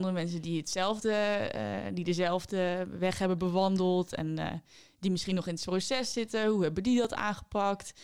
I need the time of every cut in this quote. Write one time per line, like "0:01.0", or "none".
none

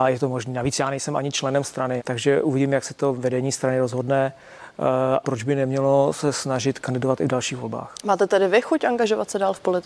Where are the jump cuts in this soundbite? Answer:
0:02.0
0:05.2

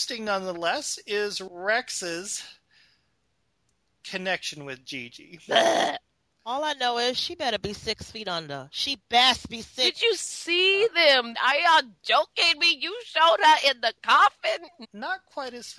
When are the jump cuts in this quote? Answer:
0:11.3
0:14.8

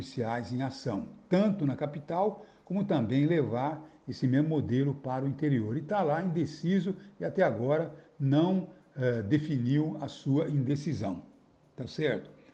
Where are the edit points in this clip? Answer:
none

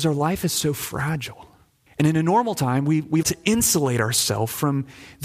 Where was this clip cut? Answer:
0:01.9
0:03.2

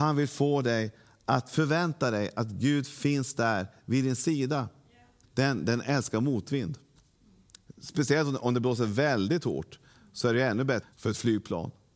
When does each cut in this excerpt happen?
0:05.2
0:10.8

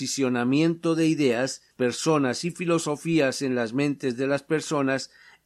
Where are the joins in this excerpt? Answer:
0:01.7

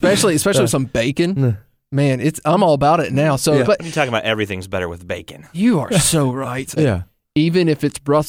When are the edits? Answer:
0:03.6
0:06.8

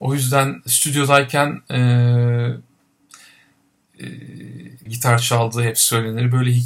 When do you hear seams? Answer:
0:04.9

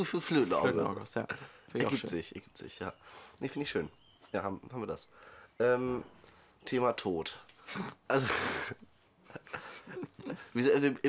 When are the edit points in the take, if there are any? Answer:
none

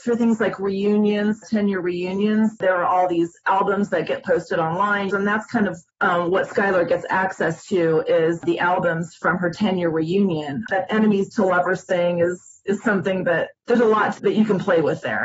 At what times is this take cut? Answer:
0:05.1
0:10.7

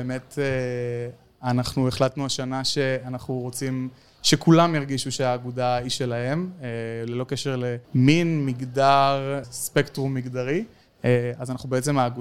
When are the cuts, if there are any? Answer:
0:07.8
0:09.4

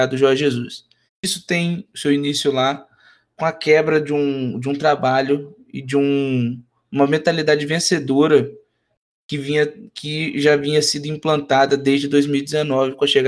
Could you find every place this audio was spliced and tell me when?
0:01.1

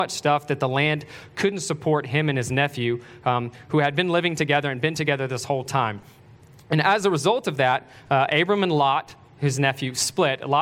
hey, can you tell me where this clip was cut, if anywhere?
none

